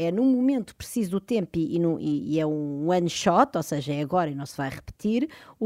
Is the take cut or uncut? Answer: uncut